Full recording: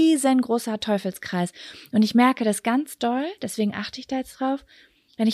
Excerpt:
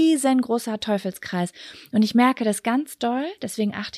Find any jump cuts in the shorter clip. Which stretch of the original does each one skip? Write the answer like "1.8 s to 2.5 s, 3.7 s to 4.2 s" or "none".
none